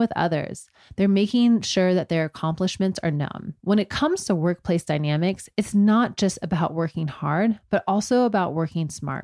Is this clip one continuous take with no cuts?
no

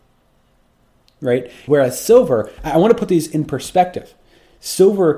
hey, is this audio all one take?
no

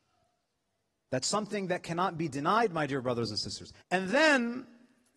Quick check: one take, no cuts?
no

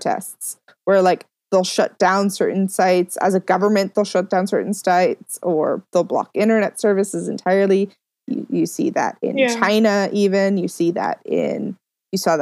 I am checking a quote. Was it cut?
no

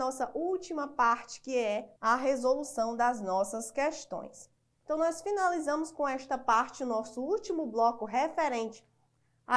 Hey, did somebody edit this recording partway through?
yes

